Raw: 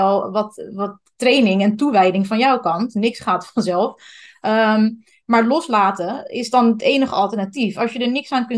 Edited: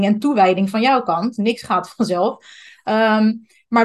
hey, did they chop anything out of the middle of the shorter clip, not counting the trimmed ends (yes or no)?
no